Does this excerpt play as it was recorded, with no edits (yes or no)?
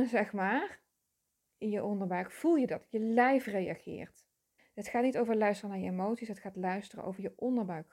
no